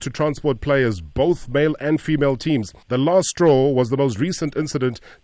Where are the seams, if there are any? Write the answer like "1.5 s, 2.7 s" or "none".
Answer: 2.8 s